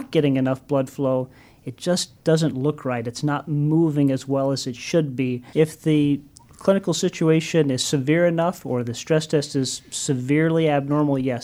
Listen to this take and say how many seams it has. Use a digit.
1